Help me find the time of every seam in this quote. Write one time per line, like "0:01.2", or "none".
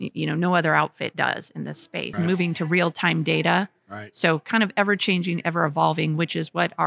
0:02.1